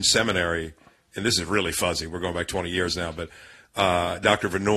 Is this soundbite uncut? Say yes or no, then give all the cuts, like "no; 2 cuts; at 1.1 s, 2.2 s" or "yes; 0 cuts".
yes; 0 cuts